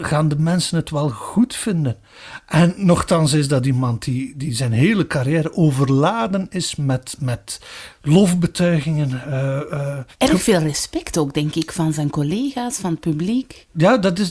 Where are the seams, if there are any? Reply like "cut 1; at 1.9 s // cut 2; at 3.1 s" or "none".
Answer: none